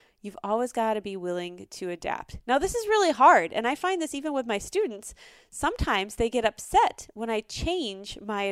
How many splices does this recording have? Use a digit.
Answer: 0